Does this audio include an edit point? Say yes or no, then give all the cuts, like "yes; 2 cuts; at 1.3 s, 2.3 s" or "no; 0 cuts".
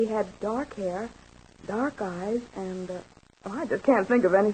no; 0 cuts